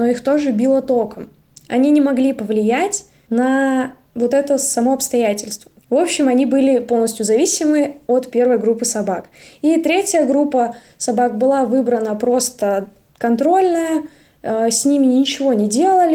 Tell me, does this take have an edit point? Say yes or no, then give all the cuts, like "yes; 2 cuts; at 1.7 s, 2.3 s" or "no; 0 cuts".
yes; 1 cut; at 5.8 s